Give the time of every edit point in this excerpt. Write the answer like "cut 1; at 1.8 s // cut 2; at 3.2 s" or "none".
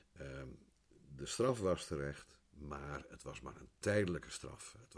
cut 1; at 2.4 s